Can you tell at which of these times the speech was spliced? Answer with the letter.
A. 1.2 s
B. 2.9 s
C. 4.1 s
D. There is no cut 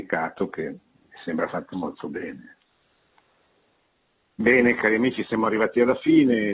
D